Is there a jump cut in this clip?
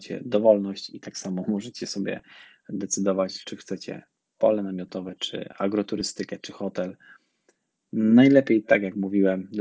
yes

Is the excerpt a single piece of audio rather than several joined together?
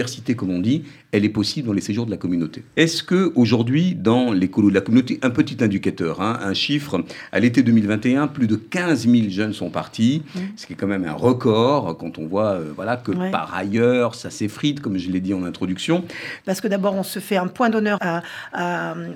no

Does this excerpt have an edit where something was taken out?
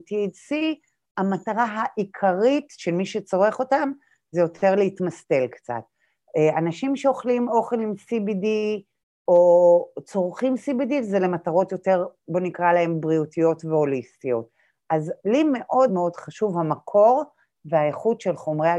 yes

